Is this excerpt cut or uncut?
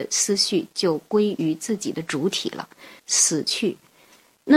cut